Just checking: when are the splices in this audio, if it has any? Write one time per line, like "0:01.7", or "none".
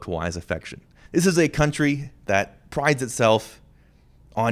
0:01.1